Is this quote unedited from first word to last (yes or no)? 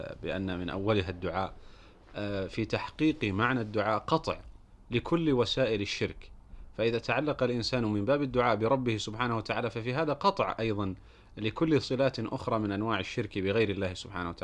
yes